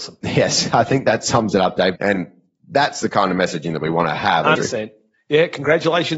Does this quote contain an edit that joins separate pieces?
yes; 2 cuts; at 2.0 s, 4.6 s

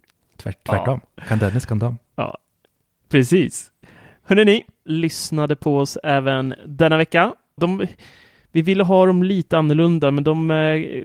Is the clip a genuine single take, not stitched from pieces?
no; 2 cuts; at 4.9 s, 7.6 s

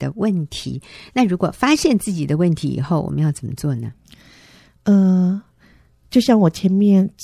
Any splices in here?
no; 0 cuts

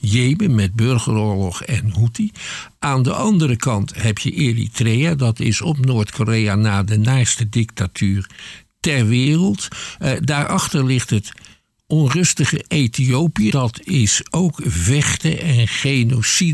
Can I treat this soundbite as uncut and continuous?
no; 1 cut; at 13.5 s

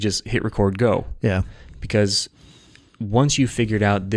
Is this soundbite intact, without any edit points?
yes; 0 cuts

